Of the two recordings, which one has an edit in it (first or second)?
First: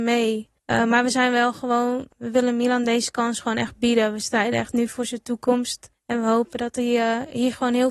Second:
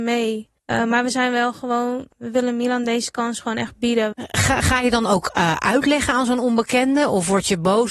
second